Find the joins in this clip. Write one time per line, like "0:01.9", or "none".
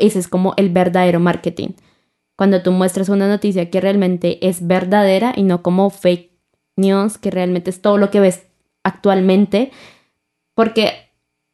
none